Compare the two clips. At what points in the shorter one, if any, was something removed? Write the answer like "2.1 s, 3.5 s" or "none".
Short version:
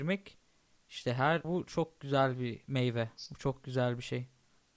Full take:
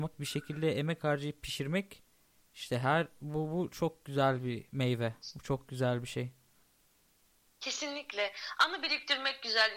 1.4 s